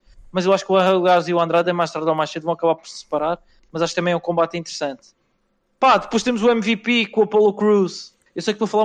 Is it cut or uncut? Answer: uncut